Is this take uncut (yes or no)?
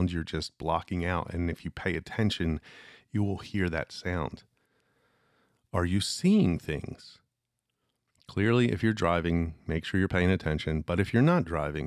yes